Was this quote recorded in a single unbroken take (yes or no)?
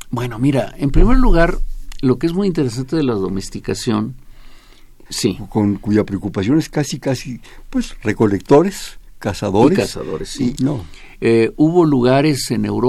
no